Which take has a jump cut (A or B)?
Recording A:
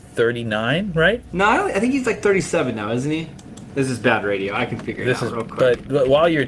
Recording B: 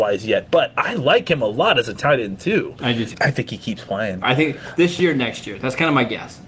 B